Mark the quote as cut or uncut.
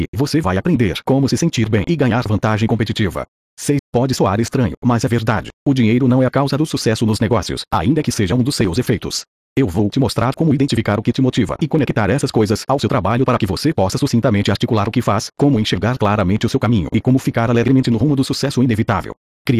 cut